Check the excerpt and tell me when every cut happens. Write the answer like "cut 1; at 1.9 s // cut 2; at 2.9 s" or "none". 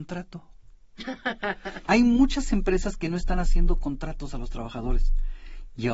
cut 1; at 1.9 s